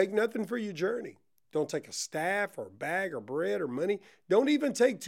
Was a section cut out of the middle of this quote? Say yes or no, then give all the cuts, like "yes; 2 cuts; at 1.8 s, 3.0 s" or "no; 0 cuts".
no; 0 cuts